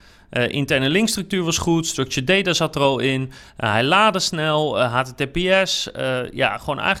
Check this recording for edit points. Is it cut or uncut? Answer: uncut